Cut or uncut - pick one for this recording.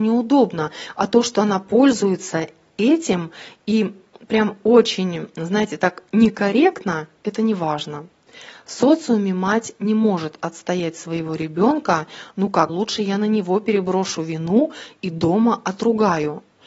cut